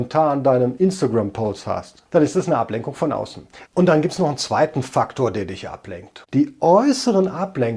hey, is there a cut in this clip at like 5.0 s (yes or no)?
no